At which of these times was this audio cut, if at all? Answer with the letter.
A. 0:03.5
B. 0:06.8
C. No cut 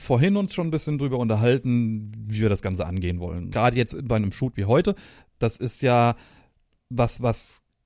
A